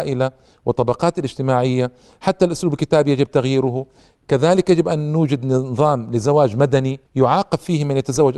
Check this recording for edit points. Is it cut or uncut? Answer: cut